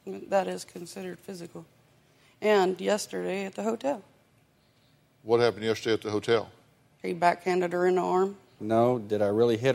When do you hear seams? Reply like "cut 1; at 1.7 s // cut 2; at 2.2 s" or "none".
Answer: cut 1; at 8.6 s

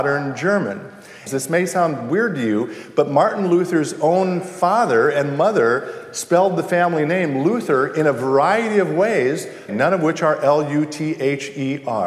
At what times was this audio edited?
cut 1; at 1.3 s // cut 2; at 9.7 s

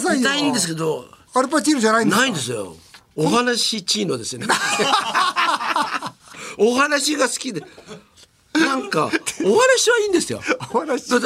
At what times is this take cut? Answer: none

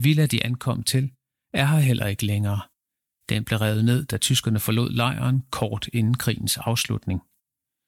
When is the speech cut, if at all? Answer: none

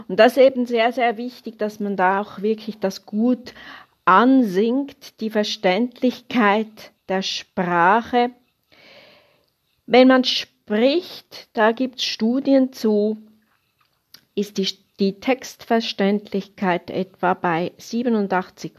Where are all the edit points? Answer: none

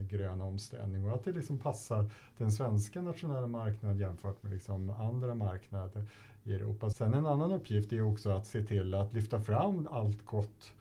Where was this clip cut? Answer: cut 1; at 6.9 s

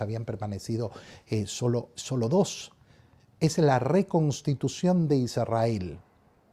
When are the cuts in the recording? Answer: cut 1; at 2.0 s

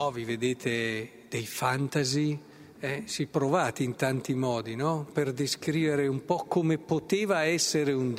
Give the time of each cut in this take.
cut 1; at 5.1 s

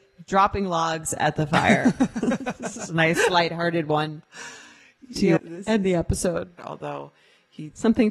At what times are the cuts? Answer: cut 1; at 5.4 s // cut 2; at 6.6 s

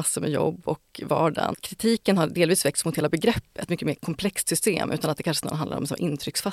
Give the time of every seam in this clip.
cut 1; at 1.5 s // cut 2; at 3.7 s

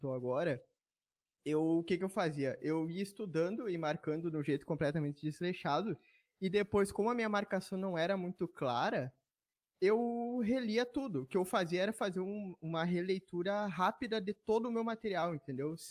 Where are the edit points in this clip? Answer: none

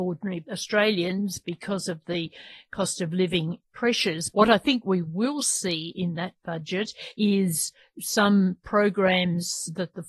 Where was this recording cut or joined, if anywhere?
cut 1; at 4.3 s

